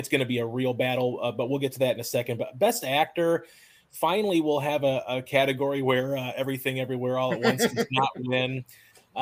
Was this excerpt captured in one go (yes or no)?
yes